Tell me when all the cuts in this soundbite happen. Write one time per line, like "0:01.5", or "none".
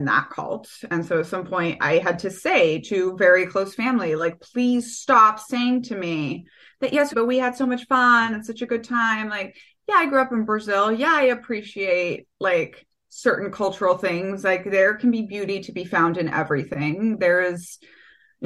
0:07.1